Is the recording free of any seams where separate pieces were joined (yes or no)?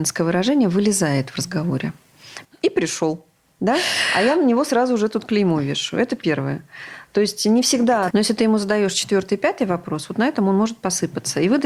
no